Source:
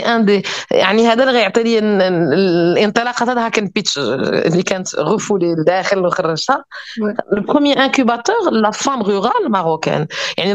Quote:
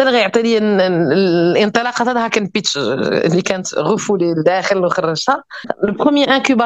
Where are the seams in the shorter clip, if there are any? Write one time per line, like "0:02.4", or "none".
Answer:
0:05.6